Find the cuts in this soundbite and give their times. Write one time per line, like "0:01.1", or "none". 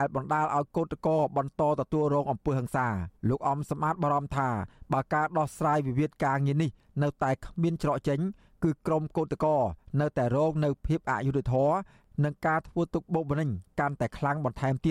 0:03.2